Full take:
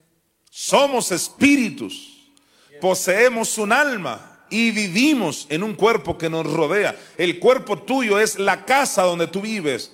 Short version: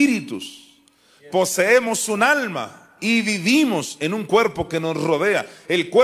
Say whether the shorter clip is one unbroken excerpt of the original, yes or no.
yes